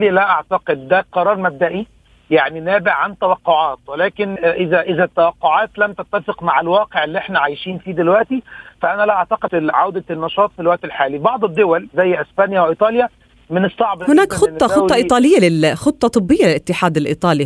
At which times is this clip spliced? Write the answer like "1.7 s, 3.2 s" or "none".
4.4 s, 9.5 s